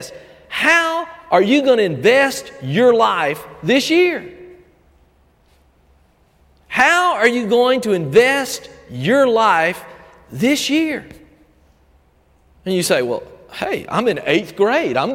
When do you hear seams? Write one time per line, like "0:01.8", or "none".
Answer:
none